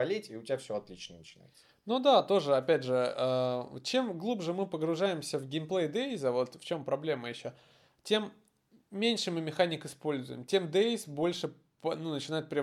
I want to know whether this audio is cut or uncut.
uncut